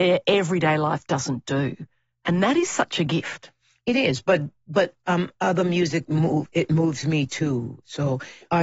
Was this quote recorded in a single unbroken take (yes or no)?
yes